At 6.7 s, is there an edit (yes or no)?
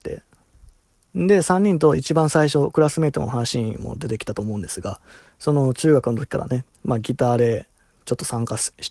yes